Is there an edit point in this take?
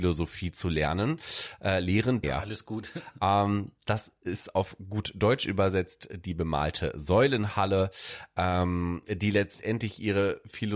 yes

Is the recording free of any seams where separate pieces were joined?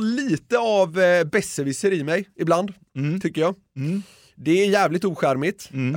yes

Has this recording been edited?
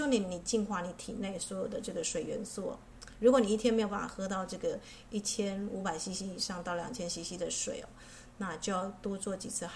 no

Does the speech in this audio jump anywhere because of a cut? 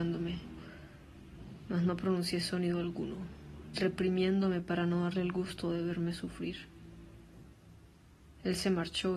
no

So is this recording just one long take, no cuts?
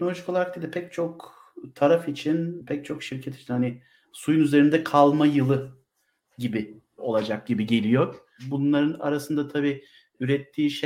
yes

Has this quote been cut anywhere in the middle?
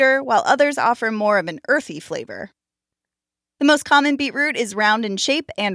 no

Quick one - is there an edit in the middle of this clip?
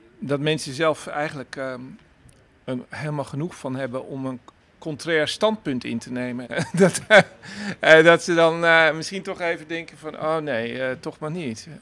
yes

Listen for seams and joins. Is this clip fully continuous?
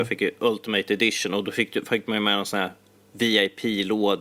yes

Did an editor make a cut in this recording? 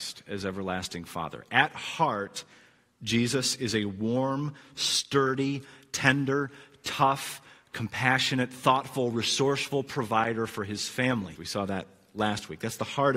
yes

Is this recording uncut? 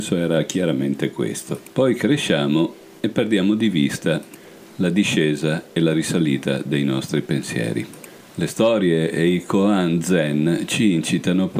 yes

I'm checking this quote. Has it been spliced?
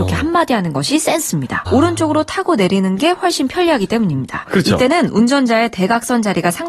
yes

